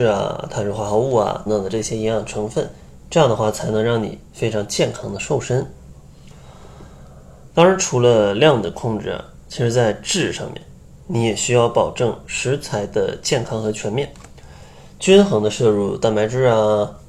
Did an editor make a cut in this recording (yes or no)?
yes